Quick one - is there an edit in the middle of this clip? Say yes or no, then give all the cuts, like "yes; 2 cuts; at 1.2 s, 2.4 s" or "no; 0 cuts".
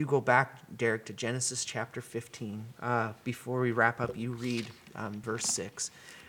yes; 2 cuts; at 2.8 s, 5.2 s